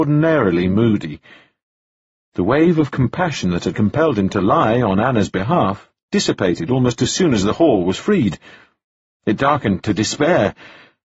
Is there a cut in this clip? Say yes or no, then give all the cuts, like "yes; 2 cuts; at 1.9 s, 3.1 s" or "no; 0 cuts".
no; 0 cuts